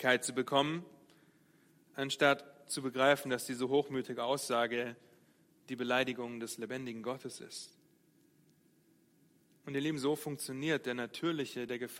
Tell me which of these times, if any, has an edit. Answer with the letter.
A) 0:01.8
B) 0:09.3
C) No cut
C